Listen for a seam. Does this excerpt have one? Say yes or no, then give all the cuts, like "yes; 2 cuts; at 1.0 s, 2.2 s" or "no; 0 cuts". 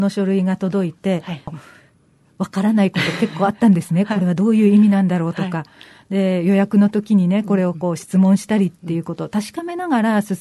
yes; 1 cut; at 1.5 s